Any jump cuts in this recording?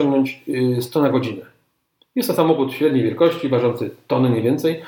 no; 0 cuts

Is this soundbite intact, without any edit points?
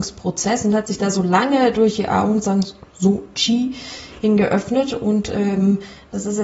yes; 0 cuts

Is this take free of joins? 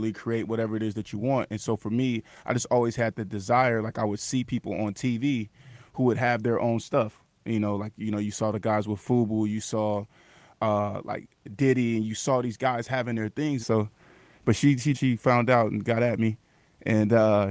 no; 2 cuts; at 13.6 s, 14.9 s

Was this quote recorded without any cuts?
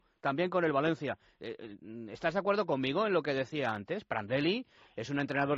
yes; 0 cuts

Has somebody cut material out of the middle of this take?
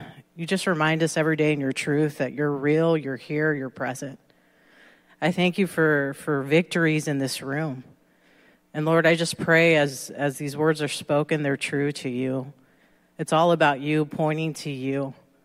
no; 0 cuts

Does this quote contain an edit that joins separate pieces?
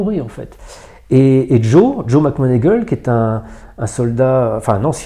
no; 0 cuts

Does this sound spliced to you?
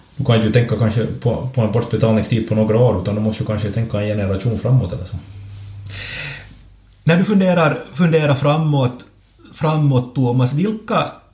no; 0 cuts

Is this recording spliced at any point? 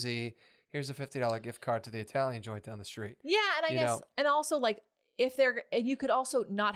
no; 0 cuts

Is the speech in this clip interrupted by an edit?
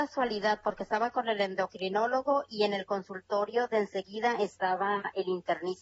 no; 0 cuts

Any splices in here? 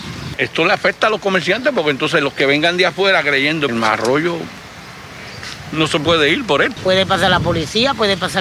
yes; 2 cuts; at 3.7 s, 6.8 s

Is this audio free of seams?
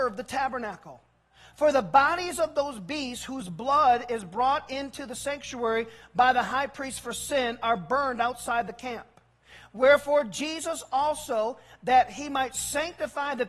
yes; 0 cuts

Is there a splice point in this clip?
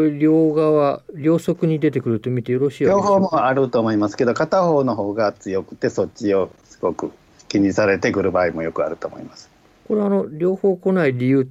no; 0 cuts

